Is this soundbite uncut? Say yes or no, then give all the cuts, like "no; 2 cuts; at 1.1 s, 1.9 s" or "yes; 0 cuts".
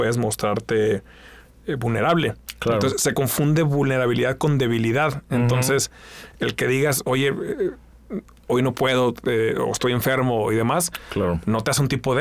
yes; 0 cuts